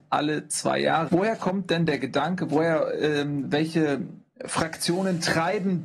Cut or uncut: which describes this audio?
cut